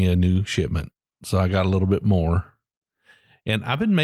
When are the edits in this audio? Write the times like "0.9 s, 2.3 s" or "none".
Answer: none